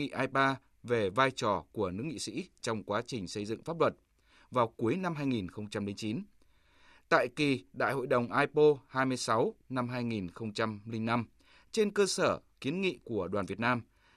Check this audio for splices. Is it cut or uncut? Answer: uncut